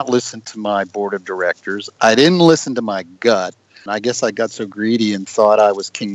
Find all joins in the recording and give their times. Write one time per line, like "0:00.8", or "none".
0:03.9